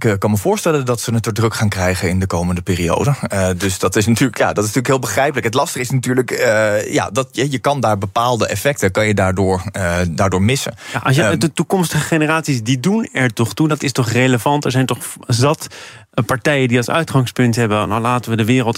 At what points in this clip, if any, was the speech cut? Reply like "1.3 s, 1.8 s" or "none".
none